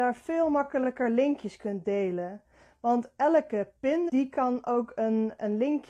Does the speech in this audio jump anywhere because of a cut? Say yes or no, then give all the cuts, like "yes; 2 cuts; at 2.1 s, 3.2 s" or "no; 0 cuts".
yes; 1 cut; at 4.1 s